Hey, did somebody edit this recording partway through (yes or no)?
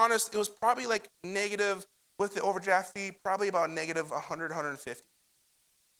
no